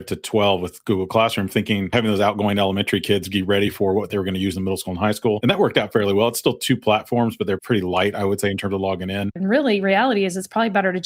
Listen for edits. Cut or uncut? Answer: cut